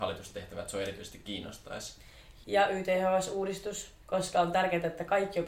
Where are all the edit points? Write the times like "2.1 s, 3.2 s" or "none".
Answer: 2.4 s, 4.0 s

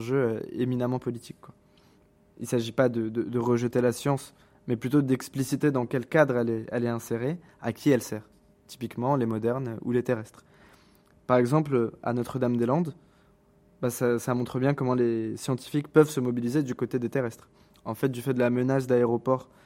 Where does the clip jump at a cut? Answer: none

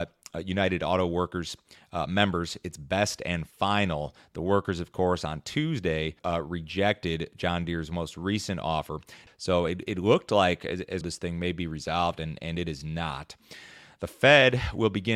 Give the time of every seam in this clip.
6.2 s, 9.3 s, 11.0 s

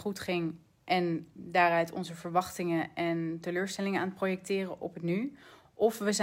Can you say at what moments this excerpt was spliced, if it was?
1.4 s

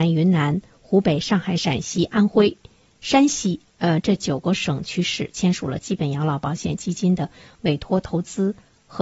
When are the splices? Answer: none

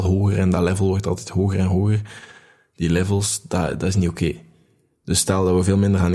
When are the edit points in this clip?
none

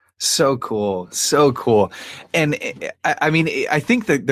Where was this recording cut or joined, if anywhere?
none

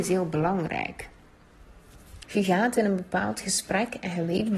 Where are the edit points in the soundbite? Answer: 2.2 s

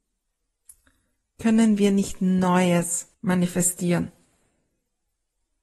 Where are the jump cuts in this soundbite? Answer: 3.1 s

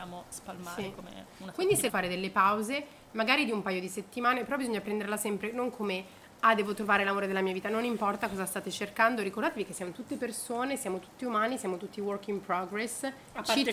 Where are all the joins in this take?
1.9 s

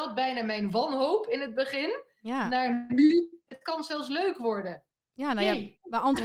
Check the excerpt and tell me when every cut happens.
none

